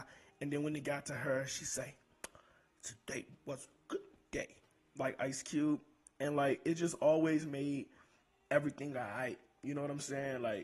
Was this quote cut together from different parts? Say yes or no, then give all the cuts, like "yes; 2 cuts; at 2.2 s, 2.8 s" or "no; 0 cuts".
no; 0 cuts